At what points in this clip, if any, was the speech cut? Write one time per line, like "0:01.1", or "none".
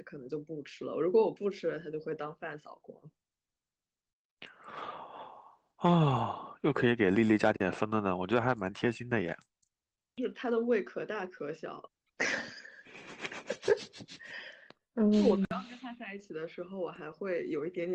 none